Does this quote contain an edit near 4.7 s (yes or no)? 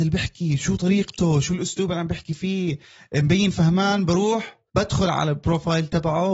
yes